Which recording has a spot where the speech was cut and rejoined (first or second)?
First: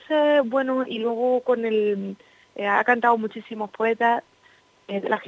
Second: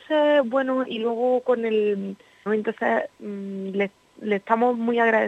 second